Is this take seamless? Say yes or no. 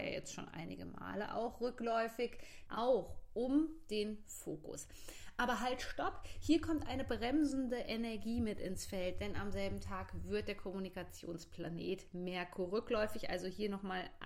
no